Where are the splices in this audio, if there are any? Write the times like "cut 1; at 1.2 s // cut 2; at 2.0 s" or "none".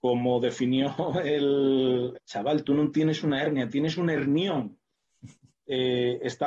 cut 1; at 2.1 s